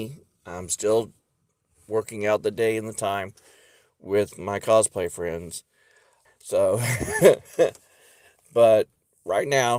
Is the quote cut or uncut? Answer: cut